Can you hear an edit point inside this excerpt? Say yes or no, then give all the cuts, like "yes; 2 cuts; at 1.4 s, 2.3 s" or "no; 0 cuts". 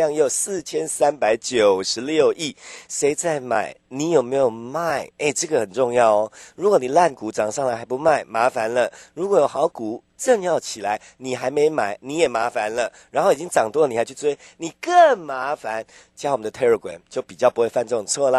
no; 0 cuts